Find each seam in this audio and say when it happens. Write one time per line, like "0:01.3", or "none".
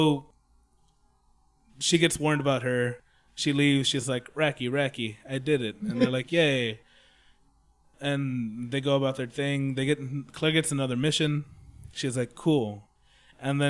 none